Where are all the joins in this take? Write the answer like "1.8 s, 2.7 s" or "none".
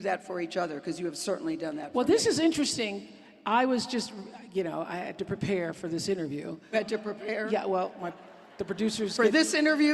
6.7 s